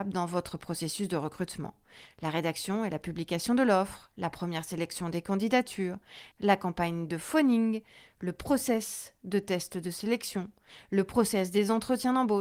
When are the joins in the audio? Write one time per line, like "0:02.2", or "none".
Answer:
0:06.3